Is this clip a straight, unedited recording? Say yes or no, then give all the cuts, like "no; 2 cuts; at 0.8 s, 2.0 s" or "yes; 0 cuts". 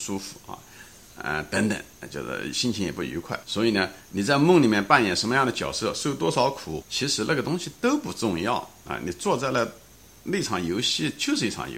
no; 2 cuts; at 3.4 s, 6.8 s